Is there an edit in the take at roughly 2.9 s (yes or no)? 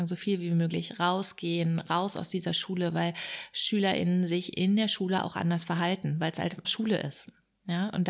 no